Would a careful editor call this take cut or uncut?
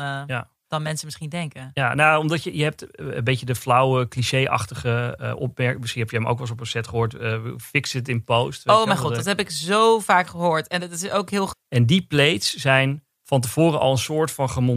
cut